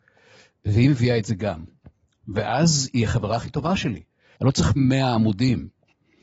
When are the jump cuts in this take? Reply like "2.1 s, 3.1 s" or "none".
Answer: 4.4 s